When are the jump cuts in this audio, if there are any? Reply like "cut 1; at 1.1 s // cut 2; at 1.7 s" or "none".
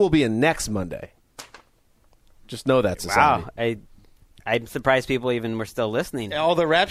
none